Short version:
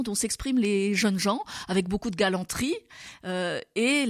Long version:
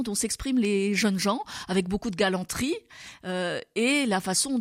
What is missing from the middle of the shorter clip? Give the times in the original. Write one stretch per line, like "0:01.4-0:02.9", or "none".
none